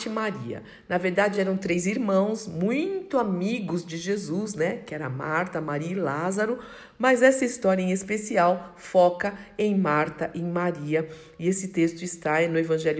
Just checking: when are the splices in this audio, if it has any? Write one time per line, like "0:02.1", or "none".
none